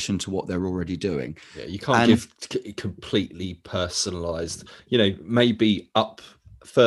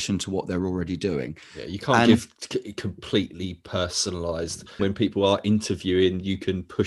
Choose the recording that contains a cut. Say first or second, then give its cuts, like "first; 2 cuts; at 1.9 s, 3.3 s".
second; 1 cut; at 4.8 s